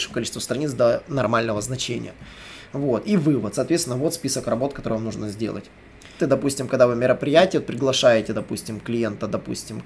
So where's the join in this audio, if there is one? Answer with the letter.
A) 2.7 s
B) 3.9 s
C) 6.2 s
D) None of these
C